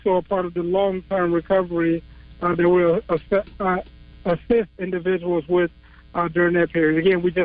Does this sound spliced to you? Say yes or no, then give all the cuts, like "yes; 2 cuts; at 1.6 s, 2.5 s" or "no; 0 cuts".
no; 0 cuts